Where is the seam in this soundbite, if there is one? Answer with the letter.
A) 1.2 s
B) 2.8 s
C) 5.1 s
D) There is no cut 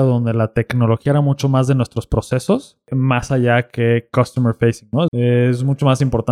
C